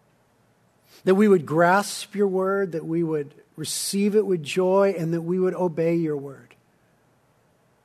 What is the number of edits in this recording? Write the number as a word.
zero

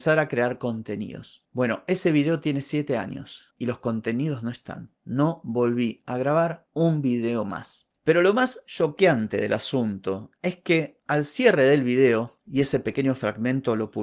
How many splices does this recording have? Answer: zero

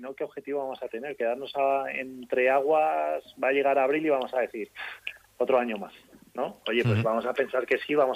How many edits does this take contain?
zero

